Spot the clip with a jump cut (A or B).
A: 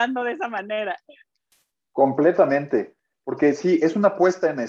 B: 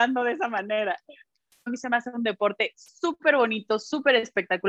B